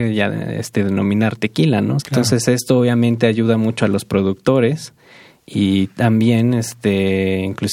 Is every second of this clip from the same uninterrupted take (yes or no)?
no